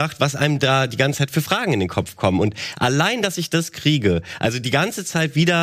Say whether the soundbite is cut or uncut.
uncut